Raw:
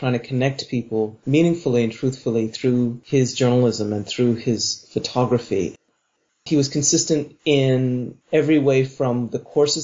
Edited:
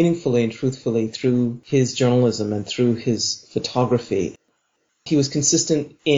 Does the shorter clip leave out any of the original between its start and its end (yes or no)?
no